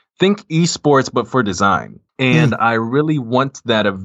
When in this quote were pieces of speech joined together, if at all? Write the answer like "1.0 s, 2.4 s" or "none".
2.1 s